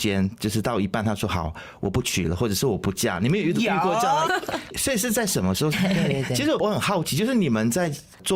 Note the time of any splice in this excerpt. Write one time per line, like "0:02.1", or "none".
0:04.3
0:05.7